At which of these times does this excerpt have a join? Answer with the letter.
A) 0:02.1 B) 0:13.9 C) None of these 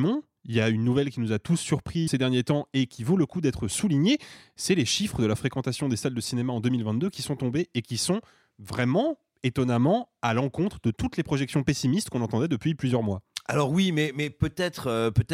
A